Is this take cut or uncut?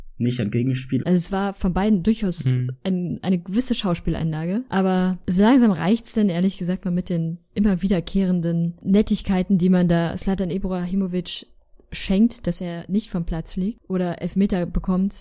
cut